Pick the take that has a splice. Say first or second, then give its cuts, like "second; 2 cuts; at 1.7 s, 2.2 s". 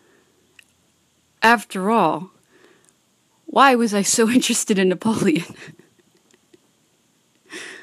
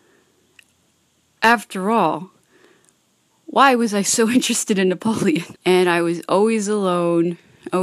second; 1 cut; at 5.6 s